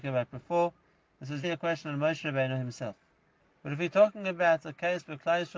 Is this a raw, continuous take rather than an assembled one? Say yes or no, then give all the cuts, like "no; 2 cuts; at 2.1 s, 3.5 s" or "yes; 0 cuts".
no; 2 cuts; at 1.4 s, 3.4 s